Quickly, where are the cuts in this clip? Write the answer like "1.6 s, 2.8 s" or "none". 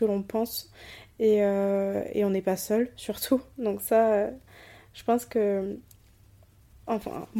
none